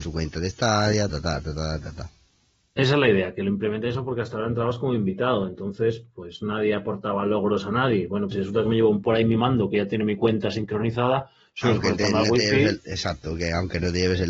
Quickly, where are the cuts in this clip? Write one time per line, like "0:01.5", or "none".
0:01.1
0:08.3